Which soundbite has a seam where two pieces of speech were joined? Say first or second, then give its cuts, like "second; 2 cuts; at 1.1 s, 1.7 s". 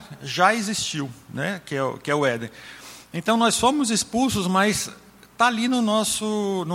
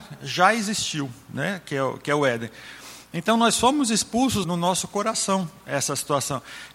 second; 1 cut; at 4.4 s